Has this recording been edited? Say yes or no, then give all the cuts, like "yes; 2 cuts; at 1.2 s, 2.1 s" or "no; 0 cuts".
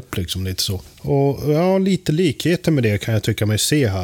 no; 0 cuts